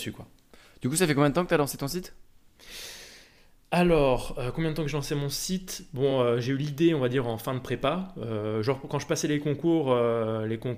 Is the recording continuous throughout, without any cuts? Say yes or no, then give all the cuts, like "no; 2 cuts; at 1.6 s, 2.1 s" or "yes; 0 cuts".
yes; 0 cuts